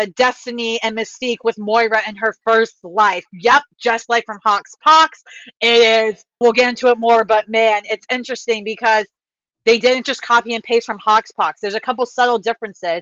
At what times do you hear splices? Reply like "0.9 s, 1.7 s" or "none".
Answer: 6.4 s